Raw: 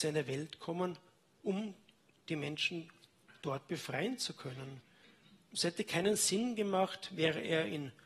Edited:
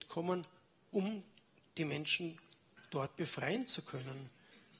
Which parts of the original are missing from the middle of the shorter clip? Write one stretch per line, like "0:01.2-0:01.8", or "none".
none